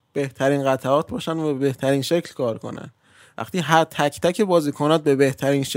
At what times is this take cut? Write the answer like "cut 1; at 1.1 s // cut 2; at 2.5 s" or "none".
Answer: none